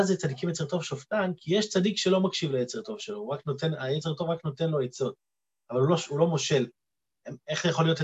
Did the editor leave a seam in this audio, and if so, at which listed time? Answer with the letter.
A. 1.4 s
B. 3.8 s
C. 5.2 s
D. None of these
D